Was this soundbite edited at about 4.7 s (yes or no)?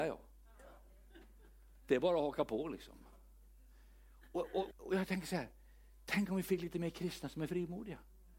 yes